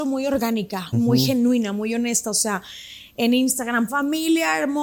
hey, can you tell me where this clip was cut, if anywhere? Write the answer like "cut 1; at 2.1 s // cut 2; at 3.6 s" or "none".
cut 1; at 0.9 s // cut 2; at 3.9 s